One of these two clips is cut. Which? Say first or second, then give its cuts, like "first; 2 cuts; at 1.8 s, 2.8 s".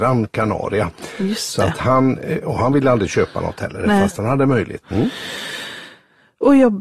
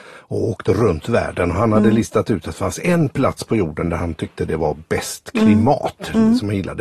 first; 1 cut; at 4.8 s